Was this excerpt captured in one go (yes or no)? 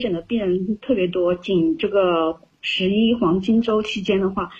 yes